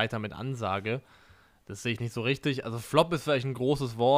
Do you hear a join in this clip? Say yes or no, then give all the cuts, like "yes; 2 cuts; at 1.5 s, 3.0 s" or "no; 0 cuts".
no; 0 cuts